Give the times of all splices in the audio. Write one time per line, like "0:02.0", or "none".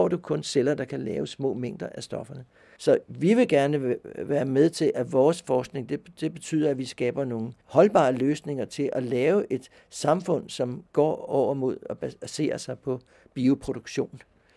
0:02.8
0:07.6